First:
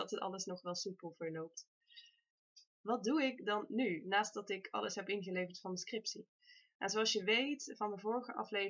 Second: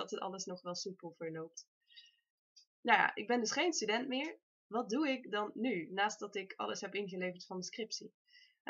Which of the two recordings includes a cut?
first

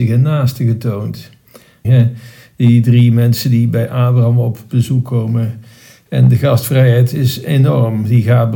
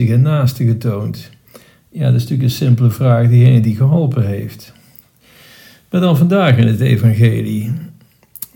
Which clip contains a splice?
first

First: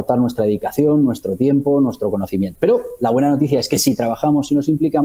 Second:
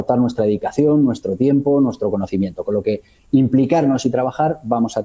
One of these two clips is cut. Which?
first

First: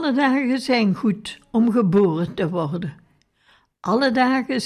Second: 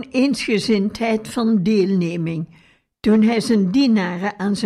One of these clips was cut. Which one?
second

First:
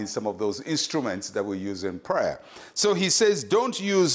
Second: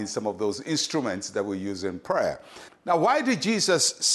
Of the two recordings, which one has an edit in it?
second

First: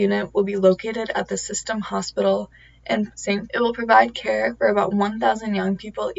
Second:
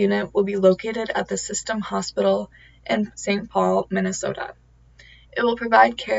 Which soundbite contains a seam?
first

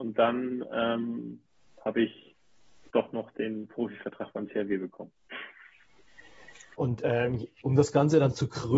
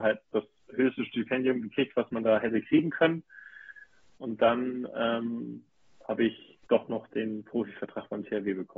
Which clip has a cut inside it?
second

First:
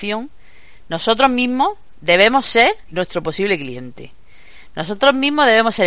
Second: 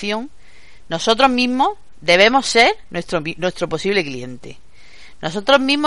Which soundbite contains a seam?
first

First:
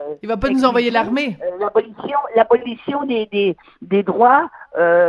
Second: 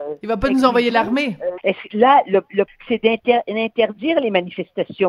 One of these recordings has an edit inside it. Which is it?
second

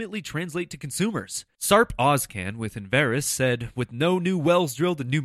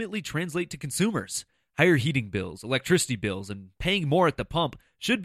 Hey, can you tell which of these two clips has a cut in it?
first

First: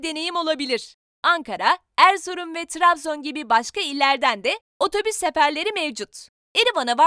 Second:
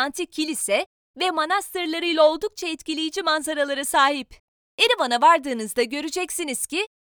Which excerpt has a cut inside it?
second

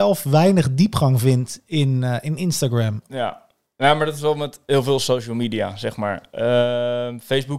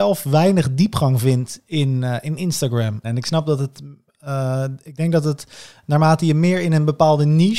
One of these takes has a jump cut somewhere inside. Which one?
second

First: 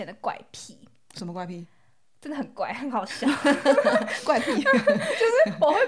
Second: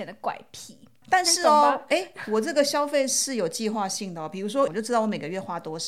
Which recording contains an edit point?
second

